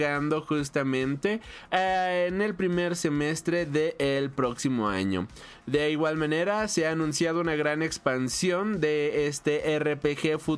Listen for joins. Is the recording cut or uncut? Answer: uncut